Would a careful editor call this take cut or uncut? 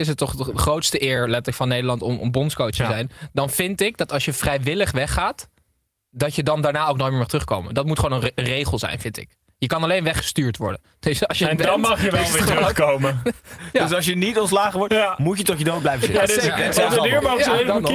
uncut